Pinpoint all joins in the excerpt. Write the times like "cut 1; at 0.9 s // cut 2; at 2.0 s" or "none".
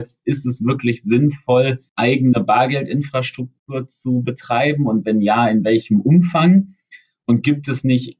cut 1; at 1.9 s